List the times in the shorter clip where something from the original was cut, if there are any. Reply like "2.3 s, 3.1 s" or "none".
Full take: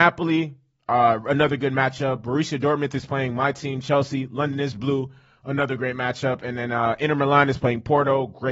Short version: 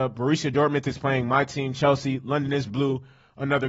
none